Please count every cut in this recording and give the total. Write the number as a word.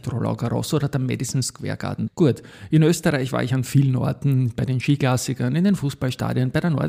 one